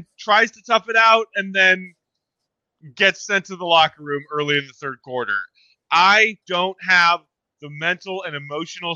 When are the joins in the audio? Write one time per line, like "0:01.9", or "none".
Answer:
0:06.4